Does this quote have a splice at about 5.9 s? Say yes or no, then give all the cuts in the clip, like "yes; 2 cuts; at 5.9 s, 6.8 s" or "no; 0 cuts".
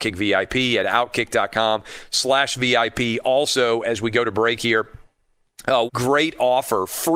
yes; 1 cut; at 5.9 s